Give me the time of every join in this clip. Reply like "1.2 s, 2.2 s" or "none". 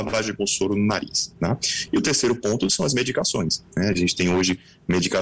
none